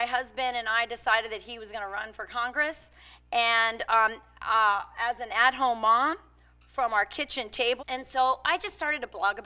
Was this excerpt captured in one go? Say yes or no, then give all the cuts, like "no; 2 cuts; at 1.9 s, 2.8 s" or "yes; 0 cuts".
no; 1 cut; at 7.8 s